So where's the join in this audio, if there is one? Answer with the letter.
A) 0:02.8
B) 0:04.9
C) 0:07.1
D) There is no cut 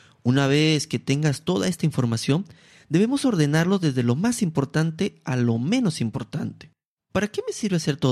C